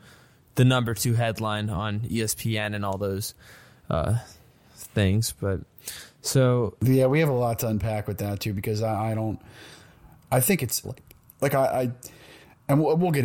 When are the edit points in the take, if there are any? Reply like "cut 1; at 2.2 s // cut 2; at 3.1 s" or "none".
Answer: cut 1; at 10.8 s